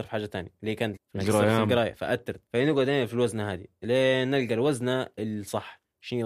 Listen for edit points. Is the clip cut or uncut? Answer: cut